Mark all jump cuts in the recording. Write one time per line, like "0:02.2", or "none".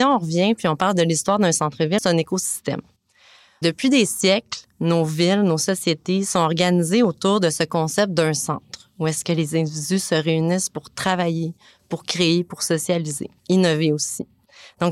0:02.0